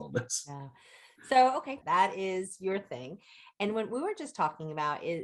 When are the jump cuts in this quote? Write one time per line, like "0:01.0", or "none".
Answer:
0:01.8